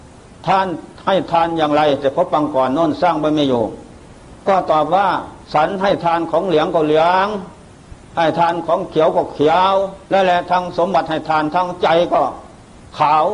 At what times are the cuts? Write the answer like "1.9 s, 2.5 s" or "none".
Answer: 5.4 s, 10.0 s